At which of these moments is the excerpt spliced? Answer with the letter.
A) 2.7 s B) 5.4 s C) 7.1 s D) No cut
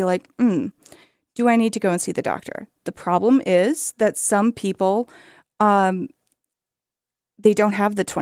D